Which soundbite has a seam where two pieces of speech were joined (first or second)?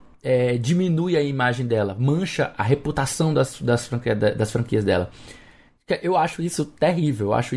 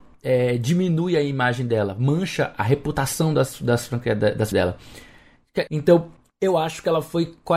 second